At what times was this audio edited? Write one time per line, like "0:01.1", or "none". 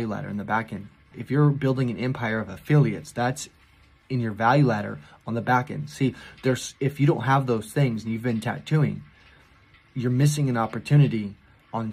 0:01.1